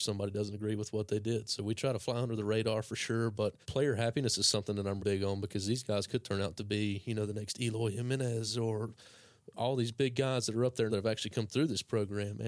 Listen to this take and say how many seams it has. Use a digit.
3